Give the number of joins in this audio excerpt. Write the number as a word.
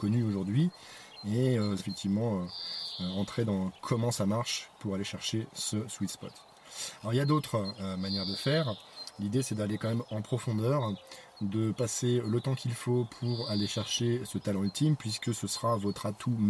one